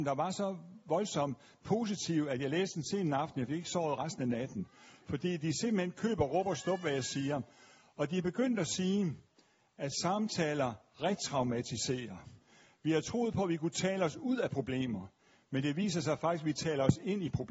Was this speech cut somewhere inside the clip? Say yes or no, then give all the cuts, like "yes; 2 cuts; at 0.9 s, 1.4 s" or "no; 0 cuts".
no; 0 cuts